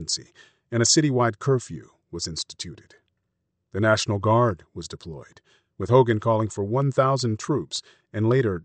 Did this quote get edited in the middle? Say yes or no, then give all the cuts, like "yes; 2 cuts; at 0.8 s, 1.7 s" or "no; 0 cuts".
no; 0 cuts